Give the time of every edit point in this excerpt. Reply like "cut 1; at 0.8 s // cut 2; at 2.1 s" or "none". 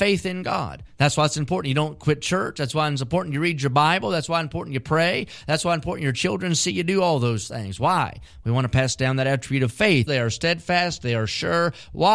cut 1; at 10.1 s